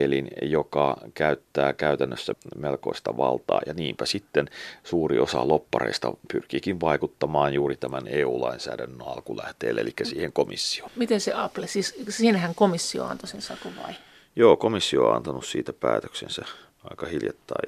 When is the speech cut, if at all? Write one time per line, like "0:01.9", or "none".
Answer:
none